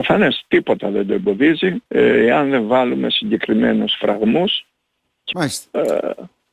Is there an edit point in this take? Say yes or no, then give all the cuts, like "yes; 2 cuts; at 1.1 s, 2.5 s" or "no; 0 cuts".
yes; 2 cuts; at 1.9 s, 5.3 s